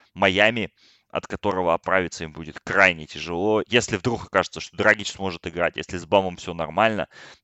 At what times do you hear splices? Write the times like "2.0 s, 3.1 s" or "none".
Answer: 3.7 s